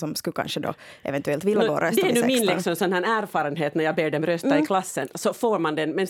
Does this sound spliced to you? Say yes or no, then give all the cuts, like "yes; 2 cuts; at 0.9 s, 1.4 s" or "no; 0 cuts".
no; 0 cuts